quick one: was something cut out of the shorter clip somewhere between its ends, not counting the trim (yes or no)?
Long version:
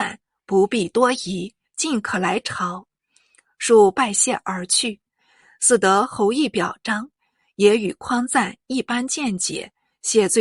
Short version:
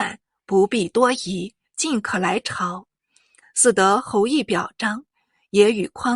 yes